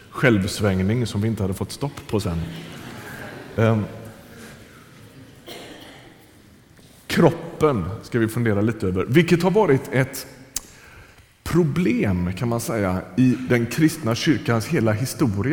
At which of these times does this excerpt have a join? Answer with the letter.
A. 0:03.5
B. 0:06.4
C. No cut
C